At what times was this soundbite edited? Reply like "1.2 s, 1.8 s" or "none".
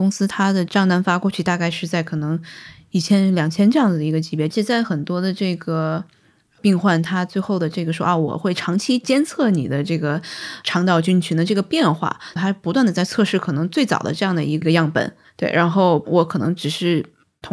12.4 s